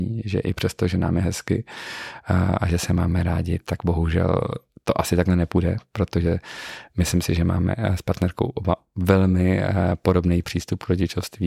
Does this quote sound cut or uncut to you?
uncut